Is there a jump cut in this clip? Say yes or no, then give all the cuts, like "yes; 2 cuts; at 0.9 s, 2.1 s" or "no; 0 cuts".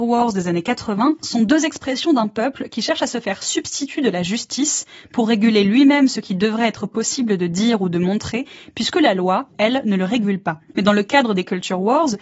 yes; 1 cut; at 10.7 s